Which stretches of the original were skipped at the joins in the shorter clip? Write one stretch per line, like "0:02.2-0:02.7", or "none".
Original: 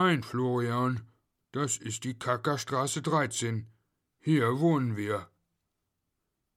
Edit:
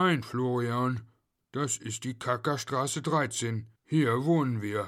0:03.8-0:04.1